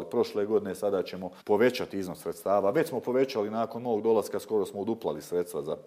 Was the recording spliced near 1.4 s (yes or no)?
yes